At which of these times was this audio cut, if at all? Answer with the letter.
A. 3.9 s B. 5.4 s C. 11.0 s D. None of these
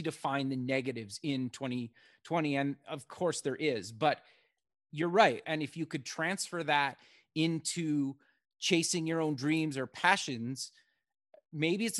B